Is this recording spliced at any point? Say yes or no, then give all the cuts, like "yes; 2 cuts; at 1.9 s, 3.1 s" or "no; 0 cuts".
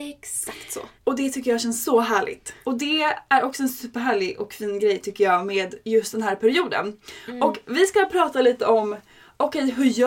yes; 2 cuts; at 1.0 s, 2.6 s